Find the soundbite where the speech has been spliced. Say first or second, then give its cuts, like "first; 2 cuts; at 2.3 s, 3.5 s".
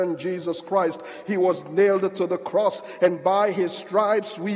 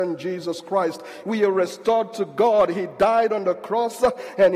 second; 1 cut; at 1.2 s